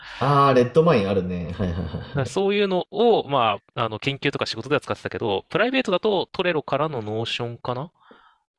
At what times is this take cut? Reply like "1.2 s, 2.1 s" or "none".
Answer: none